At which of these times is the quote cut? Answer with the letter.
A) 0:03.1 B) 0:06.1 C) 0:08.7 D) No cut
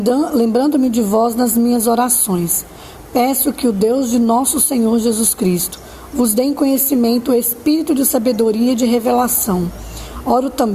B